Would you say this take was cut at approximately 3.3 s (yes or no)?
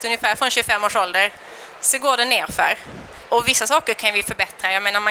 yes